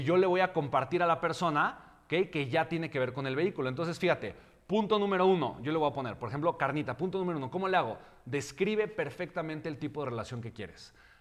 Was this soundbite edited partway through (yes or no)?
no